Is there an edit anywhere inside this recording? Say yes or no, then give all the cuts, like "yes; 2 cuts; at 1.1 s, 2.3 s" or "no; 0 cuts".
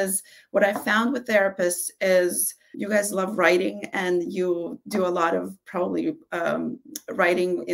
yes; 1 cut; at 2.7 s